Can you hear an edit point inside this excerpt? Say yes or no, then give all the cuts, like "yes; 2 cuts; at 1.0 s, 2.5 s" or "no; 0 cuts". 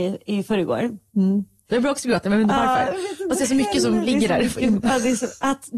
yes; 1 cut; at 1.7 s